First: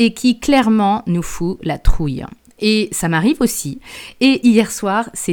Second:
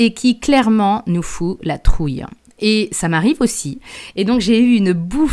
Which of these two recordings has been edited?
second; 1 cut; at 4.1 s

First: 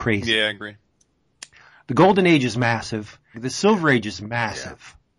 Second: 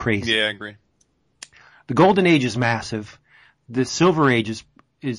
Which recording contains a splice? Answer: first; 1 cut; at 3.3 s

